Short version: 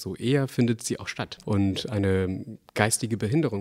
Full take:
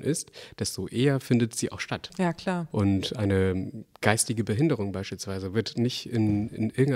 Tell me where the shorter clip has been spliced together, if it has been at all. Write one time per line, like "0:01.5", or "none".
0:01.4